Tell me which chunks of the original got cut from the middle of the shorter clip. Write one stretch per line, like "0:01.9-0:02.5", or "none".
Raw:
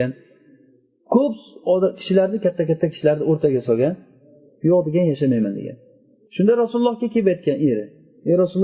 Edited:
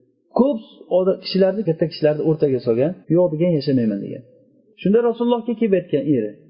0:02.4-0:02.7
0:04.0-0:04.6